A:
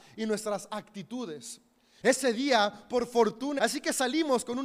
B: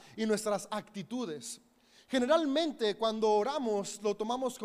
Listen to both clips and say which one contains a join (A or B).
A